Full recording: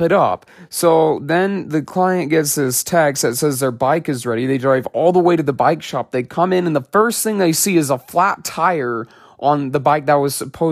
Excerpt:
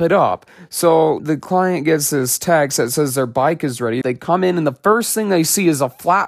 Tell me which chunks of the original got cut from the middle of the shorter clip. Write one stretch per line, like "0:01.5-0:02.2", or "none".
0:01.2-0:01.6
0:04.5-0:06.1

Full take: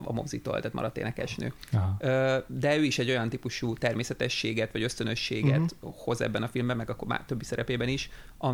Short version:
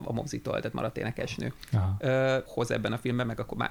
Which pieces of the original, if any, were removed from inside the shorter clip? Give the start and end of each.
0:02.5-0:06.0

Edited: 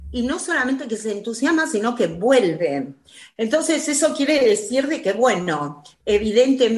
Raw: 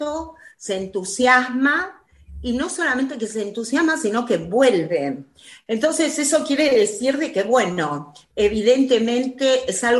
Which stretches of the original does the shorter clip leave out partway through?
none

